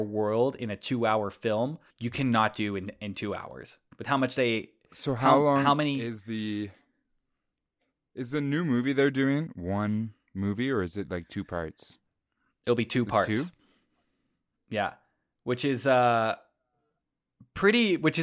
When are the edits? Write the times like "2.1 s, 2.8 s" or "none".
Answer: 1.9 s, 3.9 s